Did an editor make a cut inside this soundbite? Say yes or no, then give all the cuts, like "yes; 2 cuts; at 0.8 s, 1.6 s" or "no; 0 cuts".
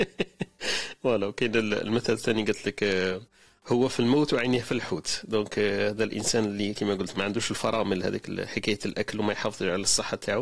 no; 0 cuts